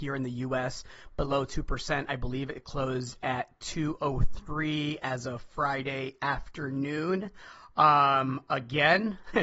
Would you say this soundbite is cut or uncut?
uncut